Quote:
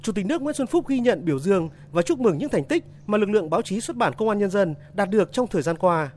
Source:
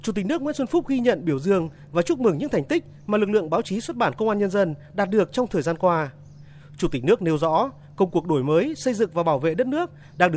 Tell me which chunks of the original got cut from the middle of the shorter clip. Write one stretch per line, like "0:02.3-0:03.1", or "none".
none